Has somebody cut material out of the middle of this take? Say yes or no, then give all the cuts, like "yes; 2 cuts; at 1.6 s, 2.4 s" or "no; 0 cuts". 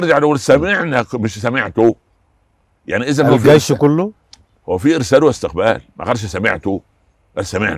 no; 0 cuts